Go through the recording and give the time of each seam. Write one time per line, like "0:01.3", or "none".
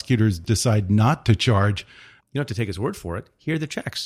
0:02.2

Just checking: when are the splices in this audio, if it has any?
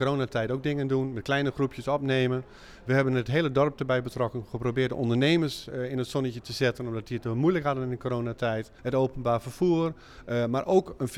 0:08.8

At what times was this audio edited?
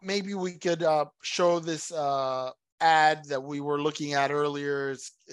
0:02.6

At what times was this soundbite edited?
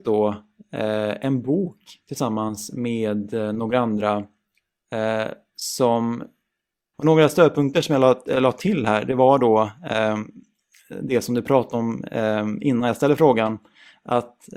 0:06.9

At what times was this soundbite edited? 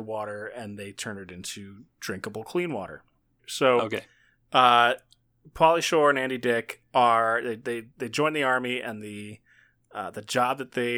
0:03.4

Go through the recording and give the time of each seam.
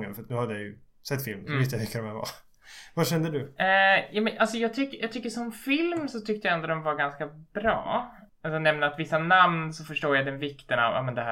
0:08.3

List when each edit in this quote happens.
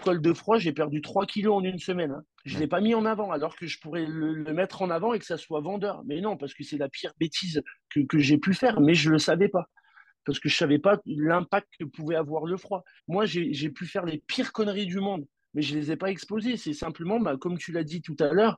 0:02.3
0:13.0

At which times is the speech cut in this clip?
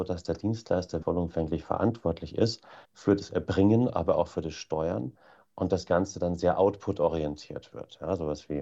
0:01.0
0:02.8

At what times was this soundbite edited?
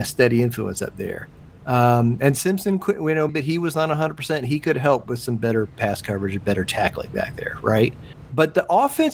0:03.3

